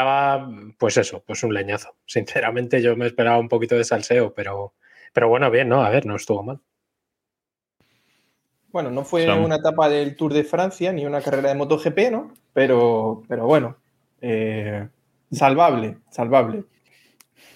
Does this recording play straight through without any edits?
yes; 0 cuts

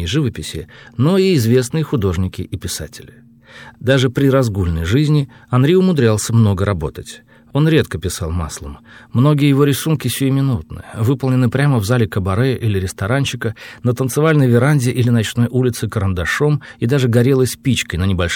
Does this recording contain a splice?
no; 0 cuts

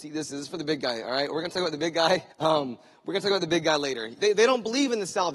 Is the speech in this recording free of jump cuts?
no; 2 cuts; at 2.3 s, 4.2 s

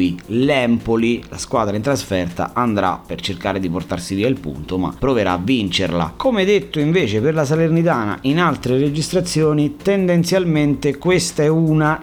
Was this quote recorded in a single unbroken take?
yes; 0 cuts

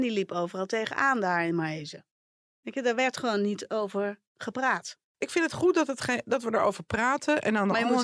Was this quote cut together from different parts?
no; 0 cuts

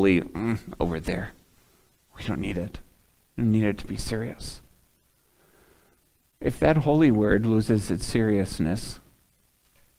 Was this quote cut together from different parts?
no; 0 cuts

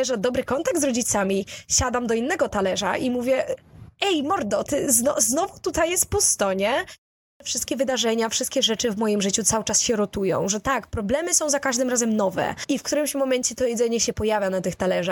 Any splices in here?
yes; 2 cuts; at 4.7 s, 12.6 s

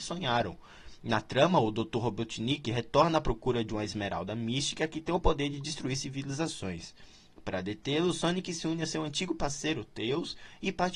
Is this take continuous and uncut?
yes; 0 cuts

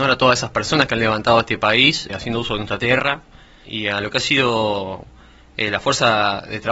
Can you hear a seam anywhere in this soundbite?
yes; 2 cuts; at 2.1 s, 3.6 s

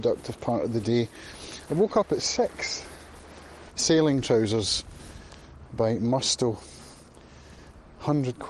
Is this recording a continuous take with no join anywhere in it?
no; 2 cuts; at 1.7 s, 3.7 s

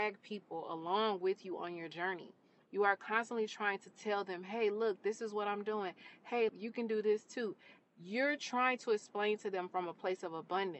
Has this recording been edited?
yes; 2 cuts; at 6.5 s, 7.8 s

